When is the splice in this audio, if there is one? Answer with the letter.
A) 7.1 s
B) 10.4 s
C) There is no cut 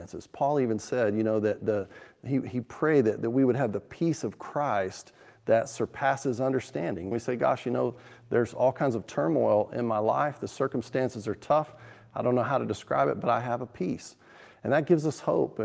A